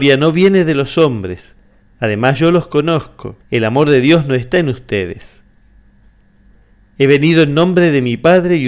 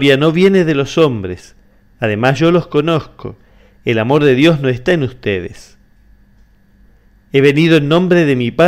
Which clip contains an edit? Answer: first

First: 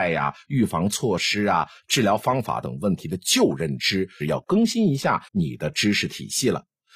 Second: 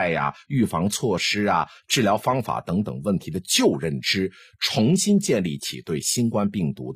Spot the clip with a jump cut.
first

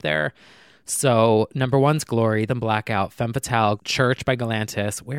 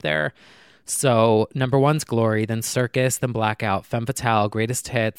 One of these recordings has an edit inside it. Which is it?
first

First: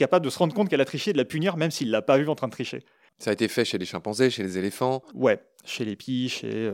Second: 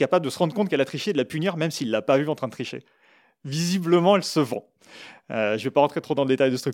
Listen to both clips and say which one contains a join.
first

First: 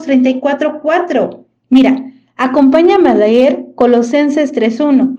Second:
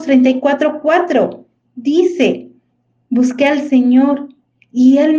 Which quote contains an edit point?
first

